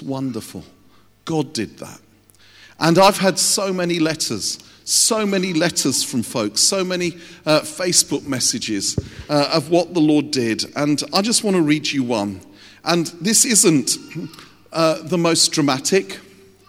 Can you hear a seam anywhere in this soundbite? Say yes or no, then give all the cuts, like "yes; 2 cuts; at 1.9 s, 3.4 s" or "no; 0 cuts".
no; 0 cuts